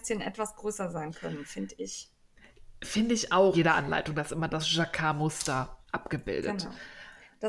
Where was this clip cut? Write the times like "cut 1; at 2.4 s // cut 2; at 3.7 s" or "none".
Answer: cut 1; at 3.5 s // cut 2; at 5.9 s